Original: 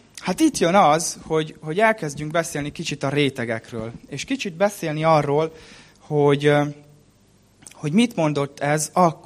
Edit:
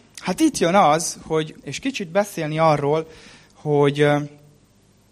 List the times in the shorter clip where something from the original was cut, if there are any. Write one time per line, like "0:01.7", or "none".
0:01.6